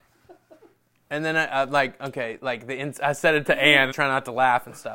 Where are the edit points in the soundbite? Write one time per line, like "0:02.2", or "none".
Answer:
0:03.9